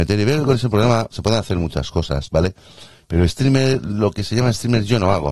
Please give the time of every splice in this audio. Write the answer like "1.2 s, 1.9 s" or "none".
3.3 s

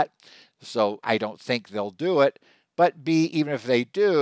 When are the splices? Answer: 1.0 s

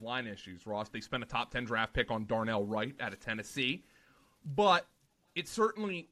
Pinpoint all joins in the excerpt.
0.9 s

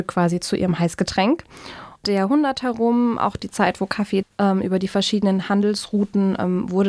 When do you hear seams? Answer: 2.0 s, 4.2 s

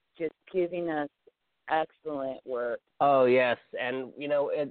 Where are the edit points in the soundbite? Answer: 2.9 s

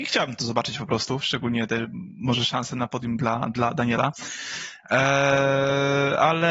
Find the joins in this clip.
none

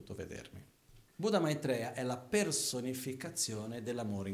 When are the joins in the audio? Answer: 1.1 s

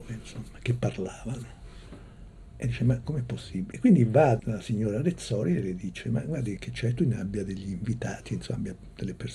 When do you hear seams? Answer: 3.7 s, 6.6 s

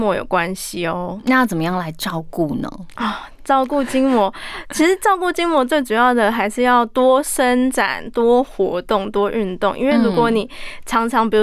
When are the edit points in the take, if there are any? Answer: none

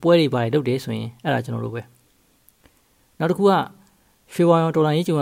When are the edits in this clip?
none

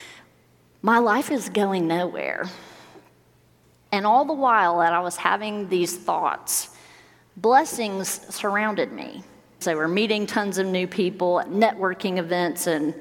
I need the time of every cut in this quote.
9.6 s

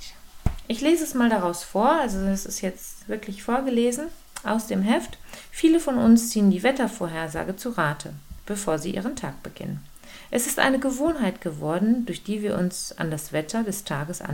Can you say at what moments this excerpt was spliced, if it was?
none

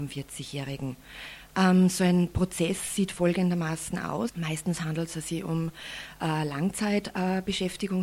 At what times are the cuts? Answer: 4.3 s

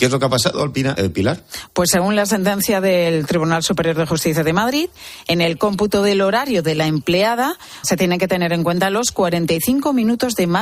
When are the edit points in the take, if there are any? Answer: 0.9 s, 7.8 s

